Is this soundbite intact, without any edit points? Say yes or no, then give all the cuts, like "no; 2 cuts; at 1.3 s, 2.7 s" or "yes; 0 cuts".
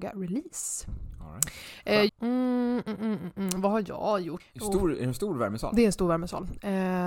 no; 2 cuts; at 2.1 s, 4.4 s